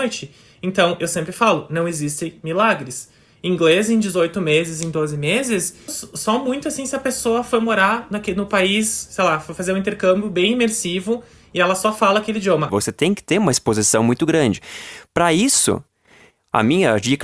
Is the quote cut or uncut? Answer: cut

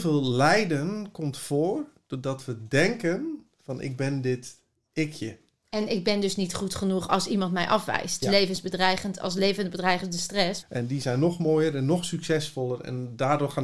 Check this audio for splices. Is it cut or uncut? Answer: cut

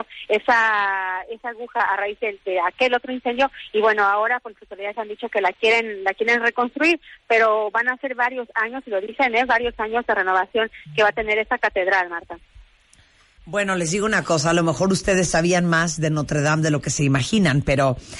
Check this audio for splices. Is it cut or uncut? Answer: uncut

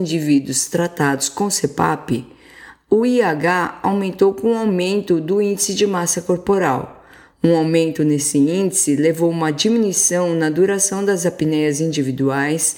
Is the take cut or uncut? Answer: cut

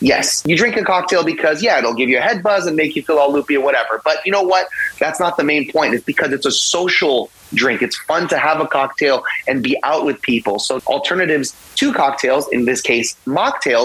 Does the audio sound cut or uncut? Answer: cut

